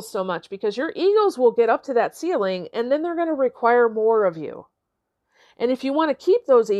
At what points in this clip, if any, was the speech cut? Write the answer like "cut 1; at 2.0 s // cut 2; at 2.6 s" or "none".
none